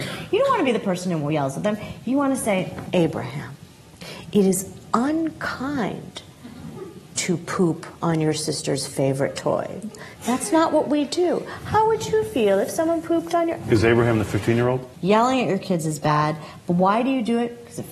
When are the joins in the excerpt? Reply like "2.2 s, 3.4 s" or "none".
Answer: 2.9 s, 13.6 s, 14.9 s